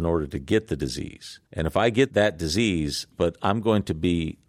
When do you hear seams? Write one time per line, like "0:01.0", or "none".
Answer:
0:01.5
0:03.1